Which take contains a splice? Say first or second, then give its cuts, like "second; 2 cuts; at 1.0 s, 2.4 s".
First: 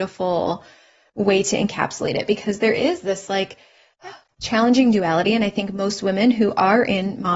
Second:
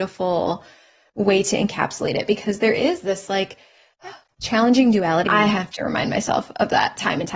second; 1 cut; at 5.3 s